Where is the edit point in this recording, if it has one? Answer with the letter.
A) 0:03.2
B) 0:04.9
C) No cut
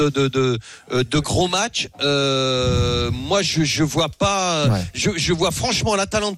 C